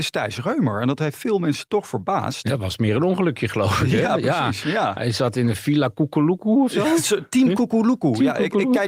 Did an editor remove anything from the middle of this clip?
no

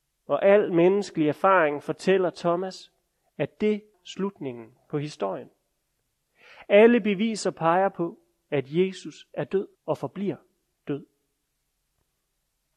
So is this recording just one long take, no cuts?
no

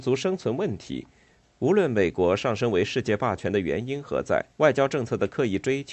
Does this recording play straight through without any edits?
no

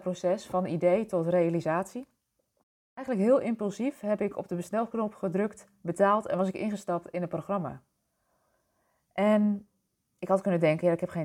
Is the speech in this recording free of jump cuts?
yes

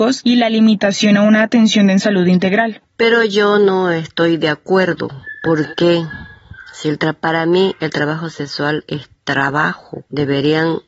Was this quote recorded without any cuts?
no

